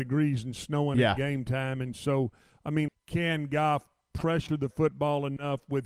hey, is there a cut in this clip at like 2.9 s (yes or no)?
yes